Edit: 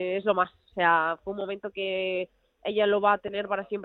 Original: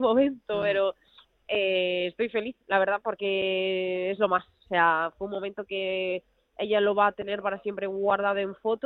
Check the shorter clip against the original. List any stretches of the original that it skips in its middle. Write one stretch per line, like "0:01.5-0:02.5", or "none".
none